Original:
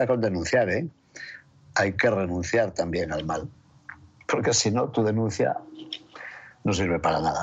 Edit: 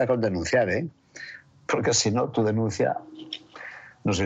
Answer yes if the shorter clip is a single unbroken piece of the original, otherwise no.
no